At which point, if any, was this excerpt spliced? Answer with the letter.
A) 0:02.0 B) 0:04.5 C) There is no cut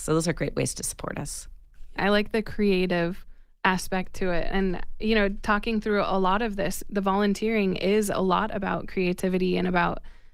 A